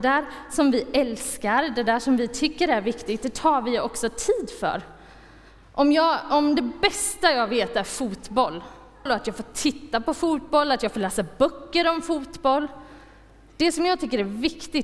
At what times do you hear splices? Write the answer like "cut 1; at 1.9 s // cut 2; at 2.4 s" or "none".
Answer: cut 1; at 9.1 s